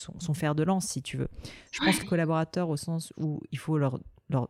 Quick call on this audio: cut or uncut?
cut